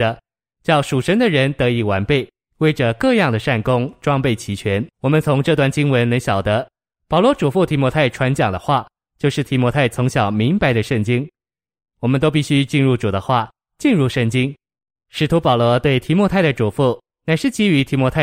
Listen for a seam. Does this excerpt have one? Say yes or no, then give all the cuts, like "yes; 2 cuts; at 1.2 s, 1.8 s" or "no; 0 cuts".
yes; 1 cut; at 4.9 s